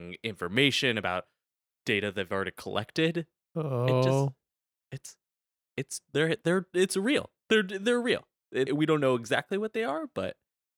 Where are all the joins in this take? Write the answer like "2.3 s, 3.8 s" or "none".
8.7 s